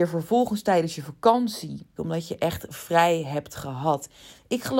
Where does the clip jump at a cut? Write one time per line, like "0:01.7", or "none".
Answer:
0:02.0